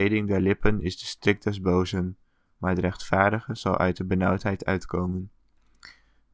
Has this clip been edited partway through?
no; 0 cuts

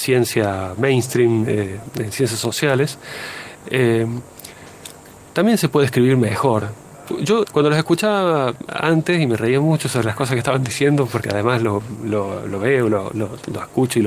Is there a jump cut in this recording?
yes; 1 cut; at 7.4 s

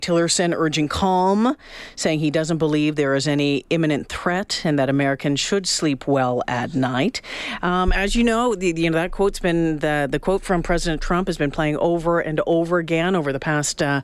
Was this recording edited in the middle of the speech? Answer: yes; 1 cut; at 7.6 s

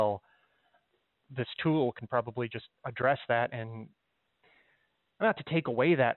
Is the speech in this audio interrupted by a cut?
no; 0 cuts

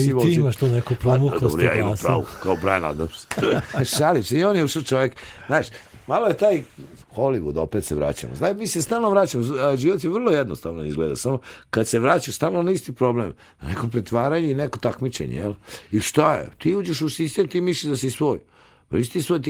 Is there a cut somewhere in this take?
yes; 1 cut; at 7.0 s

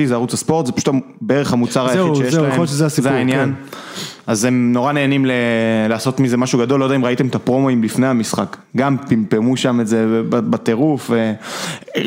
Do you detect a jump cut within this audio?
no; 0 cuts

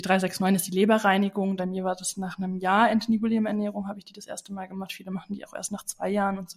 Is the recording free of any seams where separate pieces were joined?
no; 1 cut; at 1.6 s

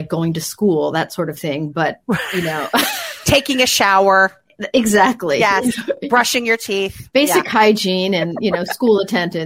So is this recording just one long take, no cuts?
yes; 0 cuts

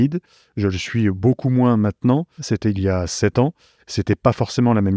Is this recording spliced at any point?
yes; 1 cut; at 2.4 s

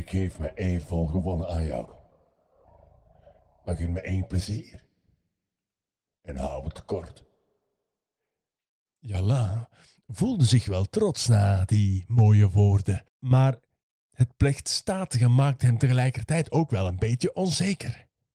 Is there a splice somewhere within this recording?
yes; 1 cut; at 13.1 s

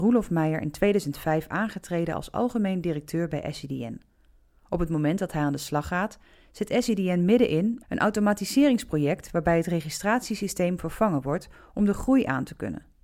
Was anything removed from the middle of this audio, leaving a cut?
yes; 1 cut; at 7.8 s

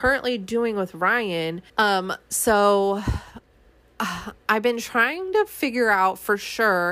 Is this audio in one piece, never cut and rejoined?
no; 1 cut; at 1.7 s

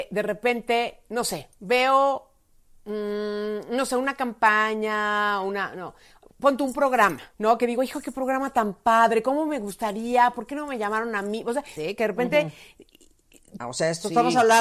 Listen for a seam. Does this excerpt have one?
yes; 3 cuts; at 7.3 s, 11.8 s, 13.6 s

